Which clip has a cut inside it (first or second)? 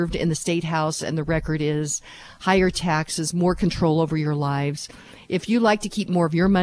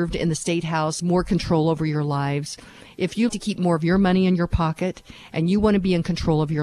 second